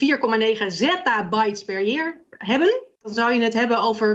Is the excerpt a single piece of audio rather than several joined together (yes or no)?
no